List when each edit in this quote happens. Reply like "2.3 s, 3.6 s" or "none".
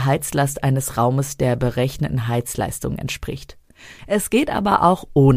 4.0 s